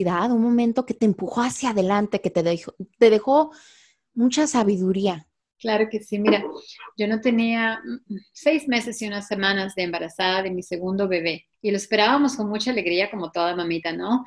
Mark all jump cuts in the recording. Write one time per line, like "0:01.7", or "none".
0:05.5
0:11.5